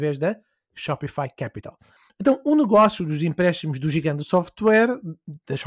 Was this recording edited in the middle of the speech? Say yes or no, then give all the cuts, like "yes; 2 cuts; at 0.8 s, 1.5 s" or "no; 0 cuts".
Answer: no; 0 cuts